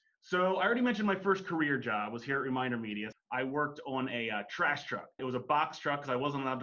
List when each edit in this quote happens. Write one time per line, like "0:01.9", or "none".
0:03.1
0:05.2